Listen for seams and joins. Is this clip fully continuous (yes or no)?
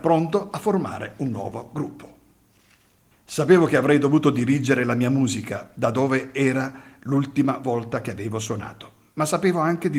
no